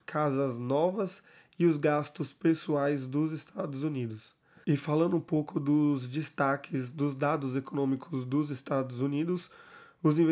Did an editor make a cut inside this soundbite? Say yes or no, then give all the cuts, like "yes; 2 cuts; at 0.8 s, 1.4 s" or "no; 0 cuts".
yes; 1 cut; at 4.6 s